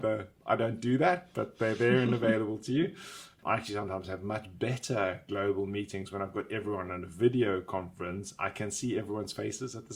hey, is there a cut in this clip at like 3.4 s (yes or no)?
yes